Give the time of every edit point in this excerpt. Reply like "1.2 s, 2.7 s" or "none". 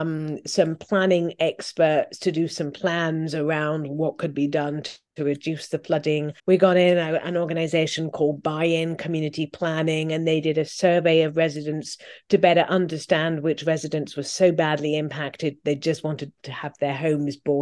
6.4 s